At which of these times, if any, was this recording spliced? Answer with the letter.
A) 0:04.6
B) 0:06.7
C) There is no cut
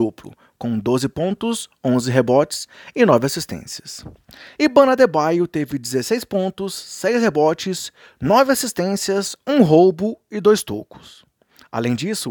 A